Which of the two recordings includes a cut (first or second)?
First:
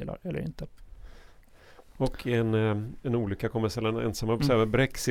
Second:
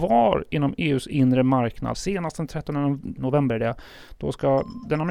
second